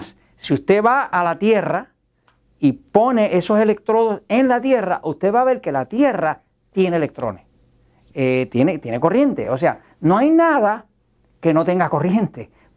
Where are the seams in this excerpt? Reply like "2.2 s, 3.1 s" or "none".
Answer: none